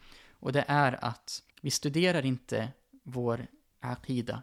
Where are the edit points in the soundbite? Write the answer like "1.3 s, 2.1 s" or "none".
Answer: 1.5 s